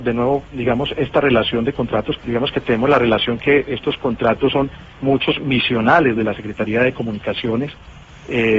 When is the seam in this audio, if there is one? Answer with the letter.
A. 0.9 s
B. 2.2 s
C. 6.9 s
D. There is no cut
B